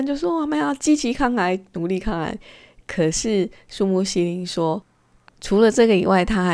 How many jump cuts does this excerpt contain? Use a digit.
1